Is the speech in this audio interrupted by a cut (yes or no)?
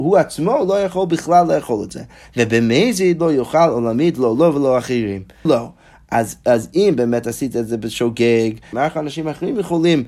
yes